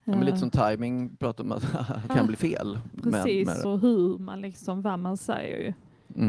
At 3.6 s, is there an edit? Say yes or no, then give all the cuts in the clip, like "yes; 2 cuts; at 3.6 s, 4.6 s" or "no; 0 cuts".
yes; 2 cuts; at 2.1 s, 3.6 s